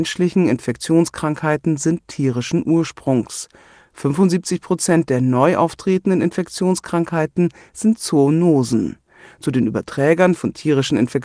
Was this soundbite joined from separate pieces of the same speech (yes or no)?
no